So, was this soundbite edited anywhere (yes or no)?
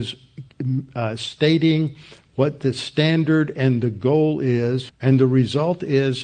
yes